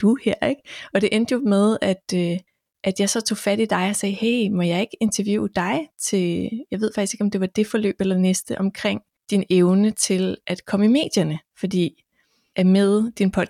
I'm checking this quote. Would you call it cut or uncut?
uncut